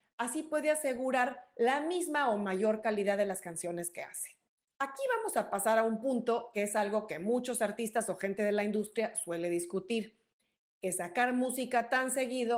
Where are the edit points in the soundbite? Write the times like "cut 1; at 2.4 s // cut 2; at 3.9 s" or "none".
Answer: cut 1; at 4.7 s